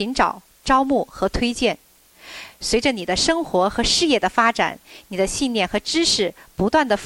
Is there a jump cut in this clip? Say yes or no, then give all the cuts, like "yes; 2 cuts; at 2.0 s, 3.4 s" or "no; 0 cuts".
no; 0 cuts